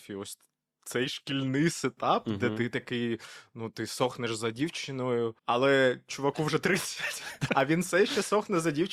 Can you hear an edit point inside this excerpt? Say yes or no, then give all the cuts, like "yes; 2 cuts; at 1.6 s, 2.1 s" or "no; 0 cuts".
yes; 2 cuts; at 5.4 s, 7.5 s